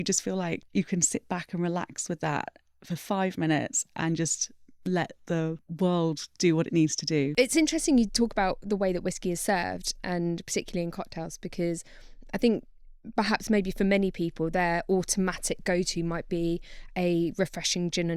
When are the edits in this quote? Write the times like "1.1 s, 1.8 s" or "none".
none